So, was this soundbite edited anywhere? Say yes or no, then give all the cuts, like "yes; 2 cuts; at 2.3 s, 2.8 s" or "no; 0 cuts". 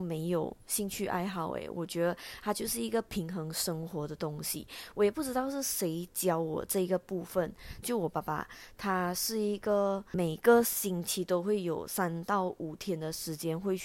yes; 1 cut; at 7.8 s